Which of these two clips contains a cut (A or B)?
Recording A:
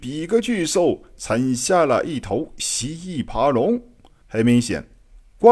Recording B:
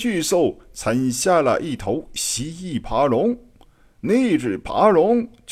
A